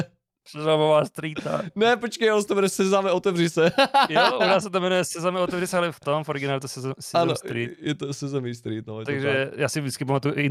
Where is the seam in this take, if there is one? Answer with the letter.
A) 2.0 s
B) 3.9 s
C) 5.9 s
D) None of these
C